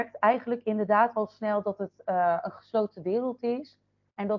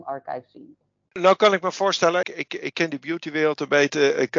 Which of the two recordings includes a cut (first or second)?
second